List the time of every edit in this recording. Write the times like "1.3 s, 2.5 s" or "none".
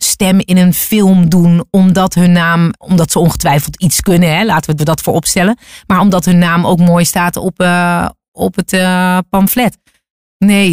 2.8 s, 4.8 s